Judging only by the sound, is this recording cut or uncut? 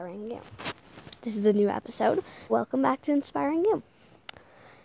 cut